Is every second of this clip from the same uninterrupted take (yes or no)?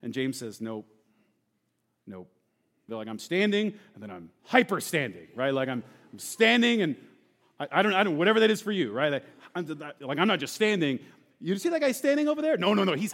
no